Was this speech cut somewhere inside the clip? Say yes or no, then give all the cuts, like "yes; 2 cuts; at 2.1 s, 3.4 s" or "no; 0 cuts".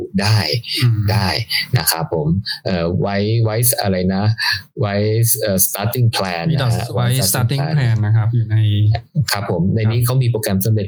no; 0 cuts